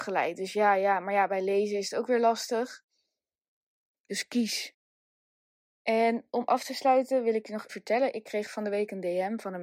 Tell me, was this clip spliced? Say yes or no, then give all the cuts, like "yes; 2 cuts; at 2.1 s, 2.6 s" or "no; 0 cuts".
yes; 2 cuts; at 3.9 s, 7.7 s